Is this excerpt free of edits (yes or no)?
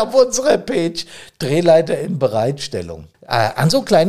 no